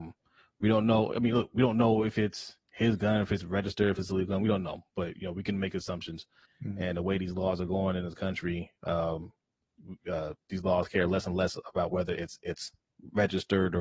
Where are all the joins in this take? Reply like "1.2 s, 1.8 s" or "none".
6.5 s